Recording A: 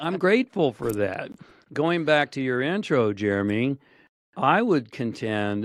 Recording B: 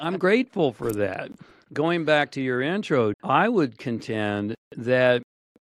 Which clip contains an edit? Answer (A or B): B